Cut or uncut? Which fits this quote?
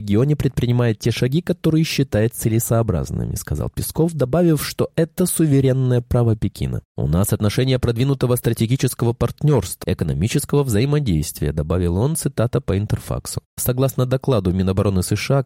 cut